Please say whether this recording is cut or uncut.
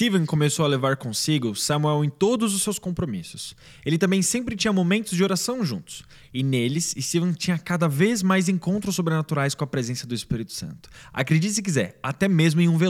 uncut